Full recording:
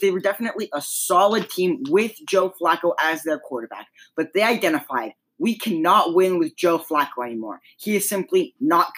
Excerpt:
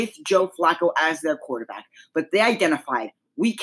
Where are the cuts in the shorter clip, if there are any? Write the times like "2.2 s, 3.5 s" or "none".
none